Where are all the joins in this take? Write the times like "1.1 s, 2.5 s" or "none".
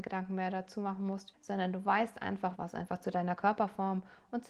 1.3 s, 2.5 s